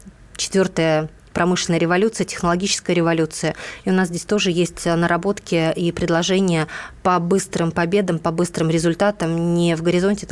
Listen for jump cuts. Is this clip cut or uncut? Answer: uncut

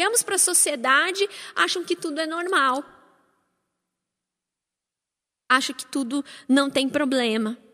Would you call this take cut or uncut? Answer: uncut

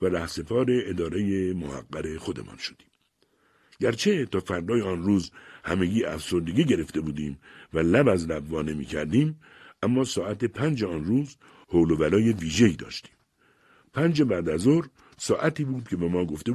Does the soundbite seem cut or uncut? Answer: uncut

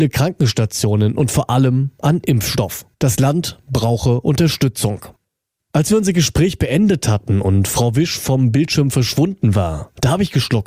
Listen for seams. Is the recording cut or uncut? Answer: cut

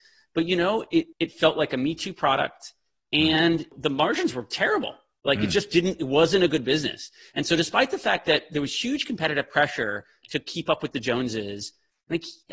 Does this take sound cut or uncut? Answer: cut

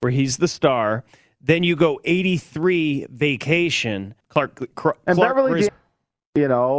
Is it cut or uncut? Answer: cut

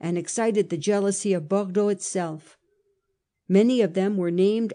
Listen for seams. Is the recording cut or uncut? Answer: cut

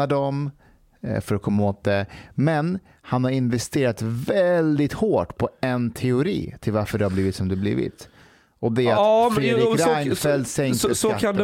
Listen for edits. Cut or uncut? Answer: uncut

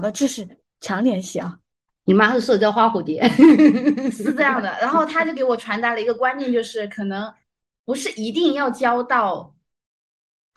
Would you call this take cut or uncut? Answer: cut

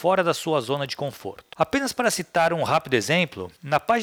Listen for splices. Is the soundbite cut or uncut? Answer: uncut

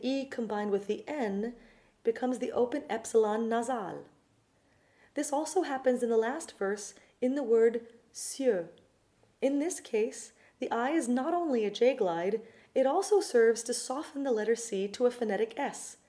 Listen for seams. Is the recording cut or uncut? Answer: uncut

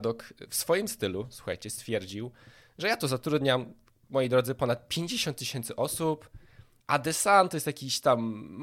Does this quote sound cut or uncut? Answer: cut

